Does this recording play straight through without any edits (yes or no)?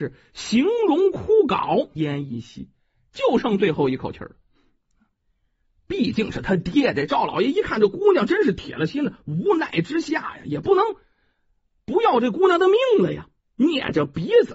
no